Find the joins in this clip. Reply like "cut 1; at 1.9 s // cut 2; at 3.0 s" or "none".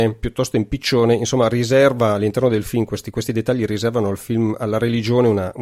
none